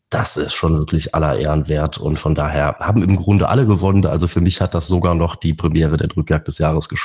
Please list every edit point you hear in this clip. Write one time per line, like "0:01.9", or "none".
0:04.0

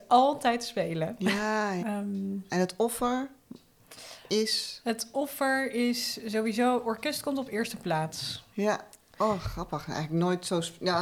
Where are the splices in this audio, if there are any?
0:01.8
0:08.5

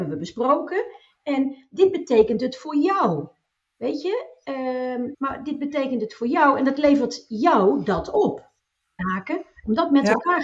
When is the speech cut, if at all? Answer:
0:05.1
0:09.0

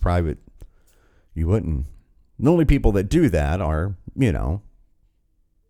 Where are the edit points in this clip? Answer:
none

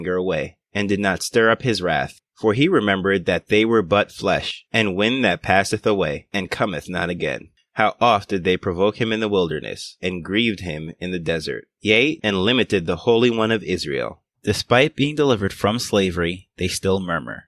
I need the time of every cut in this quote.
0:12.2
0:14.3

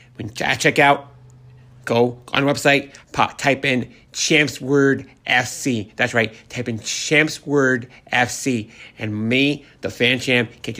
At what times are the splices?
0:03.0

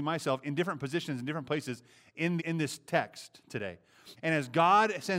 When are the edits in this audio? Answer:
0:02.4
0:04.2

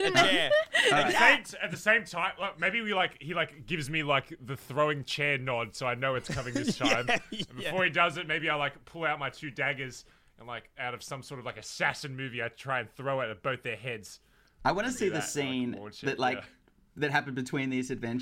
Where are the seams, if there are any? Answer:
none

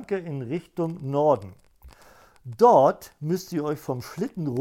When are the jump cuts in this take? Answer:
none

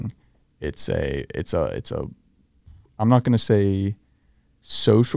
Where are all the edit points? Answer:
none

